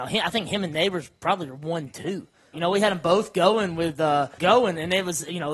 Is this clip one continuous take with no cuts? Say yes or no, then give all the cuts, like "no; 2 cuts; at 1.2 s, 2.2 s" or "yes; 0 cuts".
no; 2 cuts; at 2.5 s, 4.4 s